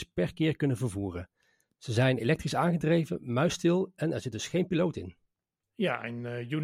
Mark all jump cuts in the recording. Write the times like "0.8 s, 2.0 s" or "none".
none